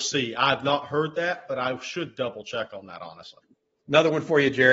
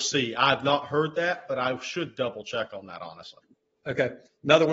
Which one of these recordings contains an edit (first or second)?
first